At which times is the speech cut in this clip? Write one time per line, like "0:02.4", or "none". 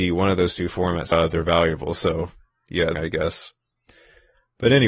0:01.1
0:02.9